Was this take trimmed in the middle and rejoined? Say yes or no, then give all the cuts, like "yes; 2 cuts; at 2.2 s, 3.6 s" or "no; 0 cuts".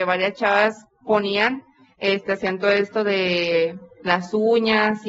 no; 0 cuts